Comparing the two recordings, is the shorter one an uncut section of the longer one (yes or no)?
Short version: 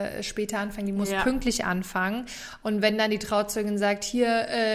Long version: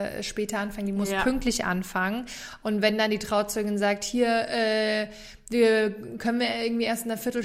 yes